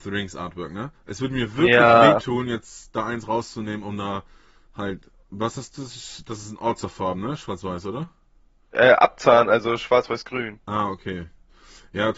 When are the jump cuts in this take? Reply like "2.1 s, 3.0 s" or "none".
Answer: none